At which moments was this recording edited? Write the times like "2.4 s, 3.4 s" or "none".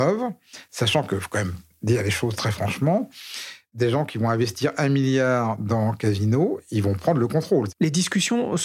7.7 s